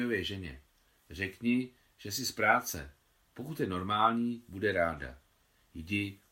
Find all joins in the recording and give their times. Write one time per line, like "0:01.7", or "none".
none